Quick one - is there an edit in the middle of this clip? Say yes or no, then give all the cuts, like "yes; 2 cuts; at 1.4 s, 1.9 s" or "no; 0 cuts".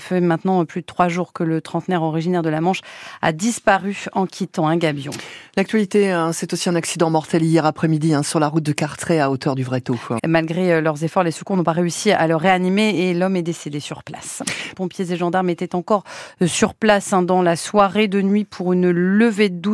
yes; 2 cuts; at 10.2 s, 14.7 s